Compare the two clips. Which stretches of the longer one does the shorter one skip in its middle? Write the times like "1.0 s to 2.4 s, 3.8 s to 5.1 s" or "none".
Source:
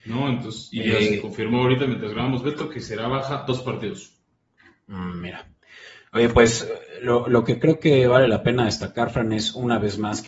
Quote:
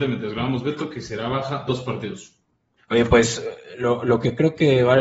4.6 s to 6.0 s